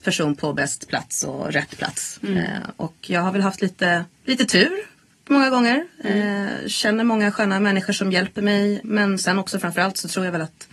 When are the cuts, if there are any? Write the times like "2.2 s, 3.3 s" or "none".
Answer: 4.1 s

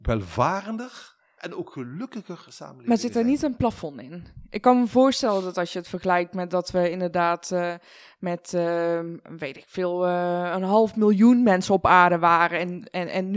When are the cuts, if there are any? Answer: none

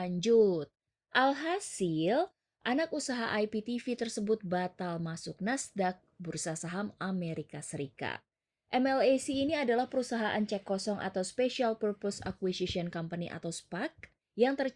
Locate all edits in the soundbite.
none

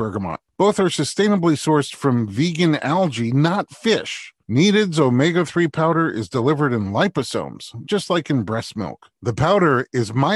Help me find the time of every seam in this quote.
4.5 s, 7.8 s, 9.1 s

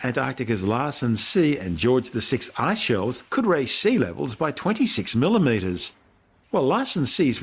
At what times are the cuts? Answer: none

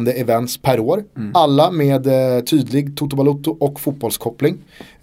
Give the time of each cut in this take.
none

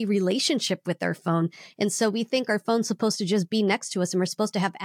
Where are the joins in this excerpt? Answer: none

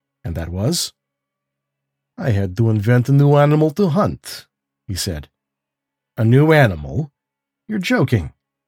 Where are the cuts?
2.1 s

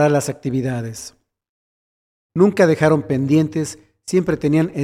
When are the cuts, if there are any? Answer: 2.3 s

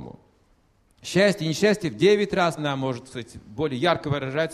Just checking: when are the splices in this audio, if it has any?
2.6 s

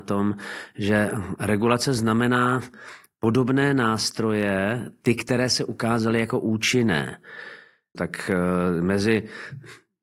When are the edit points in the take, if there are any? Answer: 7.9 s

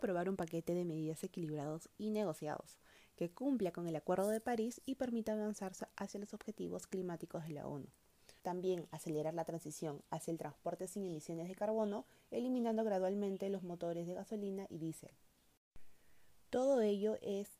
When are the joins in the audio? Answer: 8.4 s

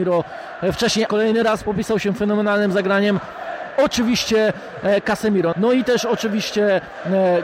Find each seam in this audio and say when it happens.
1.1 s, 5.5 s

